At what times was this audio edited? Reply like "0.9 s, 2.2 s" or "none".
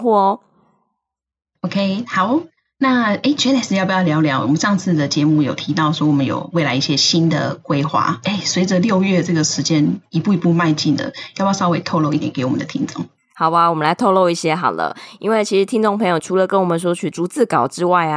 12.2 s